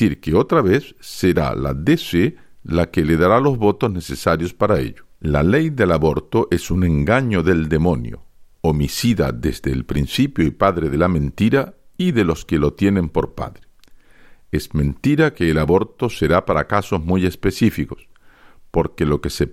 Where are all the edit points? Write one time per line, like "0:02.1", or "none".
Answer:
0:05.1